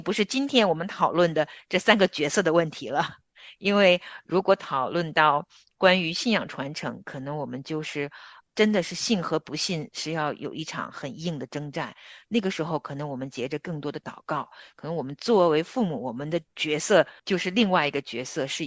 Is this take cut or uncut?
uncut